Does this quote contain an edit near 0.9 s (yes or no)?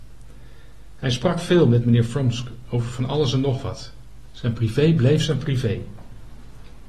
no